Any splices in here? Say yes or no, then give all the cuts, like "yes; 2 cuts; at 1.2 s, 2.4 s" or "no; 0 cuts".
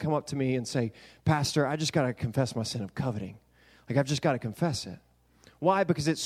no; 0 cuts